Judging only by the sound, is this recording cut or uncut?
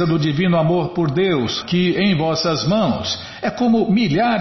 cut